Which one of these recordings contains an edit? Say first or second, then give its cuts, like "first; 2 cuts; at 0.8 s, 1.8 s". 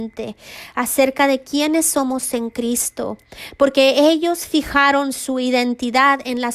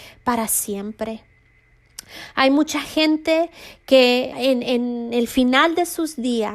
second; 1 cut; at 4.3 s